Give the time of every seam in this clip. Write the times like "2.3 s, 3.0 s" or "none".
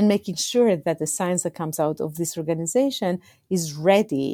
none